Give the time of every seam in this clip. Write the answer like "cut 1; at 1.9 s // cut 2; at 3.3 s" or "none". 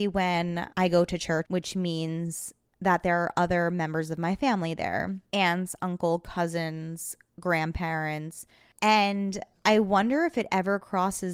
cut 1; at 1.4 s